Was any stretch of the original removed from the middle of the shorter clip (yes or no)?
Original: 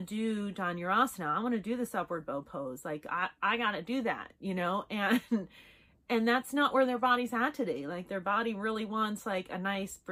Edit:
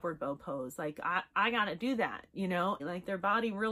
yes